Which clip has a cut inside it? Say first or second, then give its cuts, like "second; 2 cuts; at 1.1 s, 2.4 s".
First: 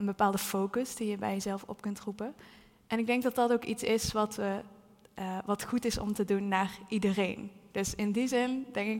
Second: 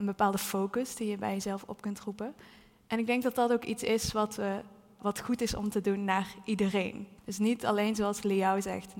second; 2 cuts; at 5.0 s, 7.2 s